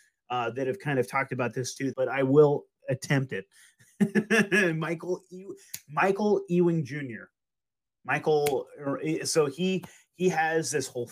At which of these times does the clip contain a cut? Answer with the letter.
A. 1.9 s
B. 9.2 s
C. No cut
A